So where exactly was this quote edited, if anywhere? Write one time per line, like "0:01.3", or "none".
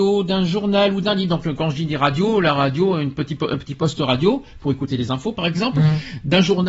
none